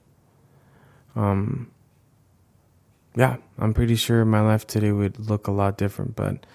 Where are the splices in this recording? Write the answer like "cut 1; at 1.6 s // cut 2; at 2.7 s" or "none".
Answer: none

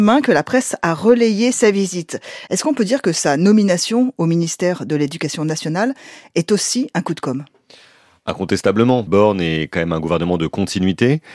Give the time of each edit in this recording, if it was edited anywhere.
cut 1; at 2.5 s // cut 2; at 9.1 s

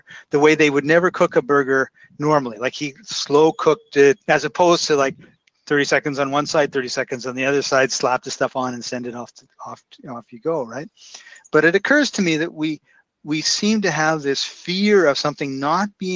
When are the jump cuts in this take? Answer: cut 1; at 4.2 s

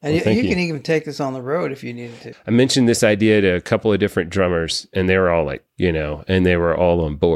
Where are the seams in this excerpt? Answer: cut 1; at 2.3 s // cut 2; at 5.7 s

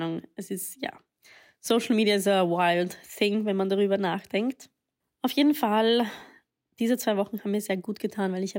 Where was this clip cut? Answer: none

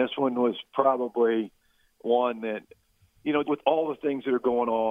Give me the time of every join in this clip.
cut 1; at 3.4 s

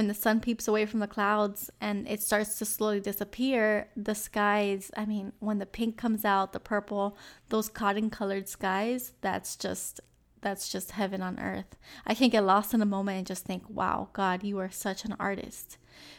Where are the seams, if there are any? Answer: none

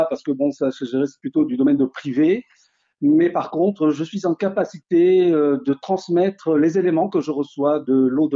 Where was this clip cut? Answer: none

